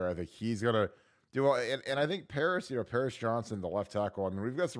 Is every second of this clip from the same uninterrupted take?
yes; 0 cuts

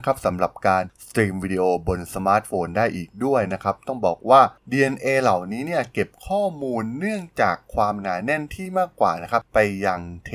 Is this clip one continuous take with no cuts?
yes; 0 cuts

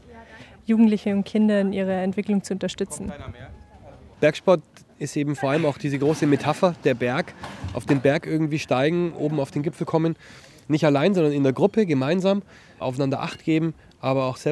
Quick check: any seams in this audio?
no; 0 cuts

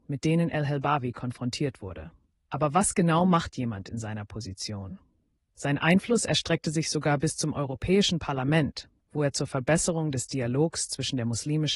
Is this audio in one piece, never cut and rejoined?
no; 2 cuts; at 2.3 s, 5.4 s

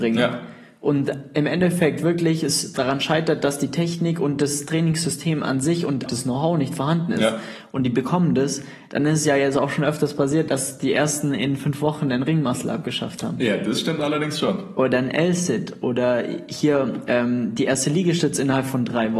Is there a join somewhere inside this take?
yes; 1 cut; at 6.1 s

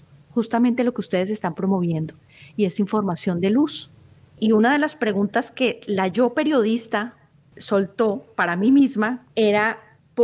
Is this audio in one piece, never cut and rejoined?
no; 2 cuts; at 4.3 s, 9.2 s

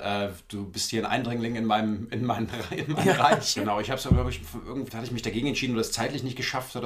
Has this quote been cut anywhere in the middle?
yes; 2 cuts; at 3.6 s, 4.9 s

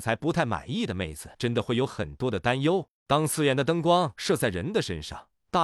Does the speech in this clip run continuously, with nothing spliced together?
no; 1 cut; at 1.3 s

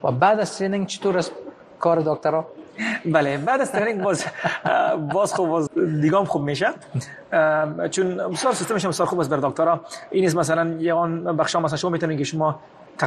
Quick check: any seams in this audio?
yes; 1 cut; at 5.7 s

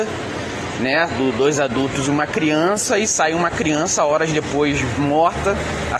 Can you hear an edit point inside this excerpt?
no; 0 cuts

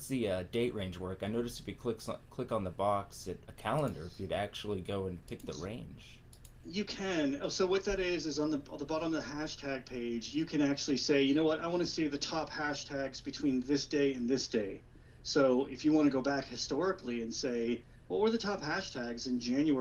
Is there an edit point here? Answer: yes; 1 cut; at 3.4 s

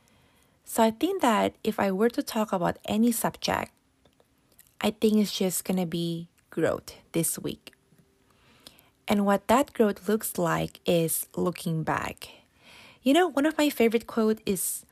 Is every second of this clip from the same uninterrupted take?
yes; 0 cuts

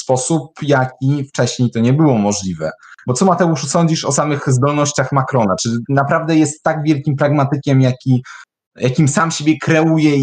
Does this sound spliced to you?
no; 0 cuts

